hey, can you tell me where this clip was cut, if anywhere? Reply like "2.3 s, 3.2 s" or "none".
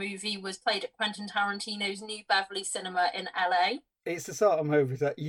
4.0 s